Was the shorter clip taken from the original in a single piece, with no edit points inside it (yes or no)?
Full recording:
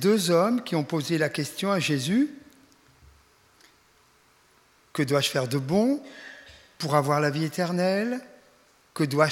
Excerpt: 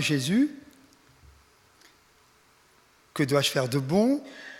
yes